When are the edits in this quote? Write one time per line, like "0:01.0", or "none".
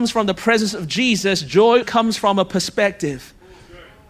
0:01.8